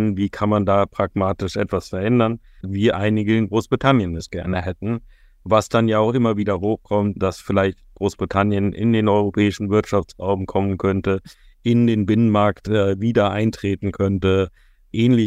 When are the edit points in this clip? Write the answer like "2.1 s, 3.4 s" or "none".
2.6 s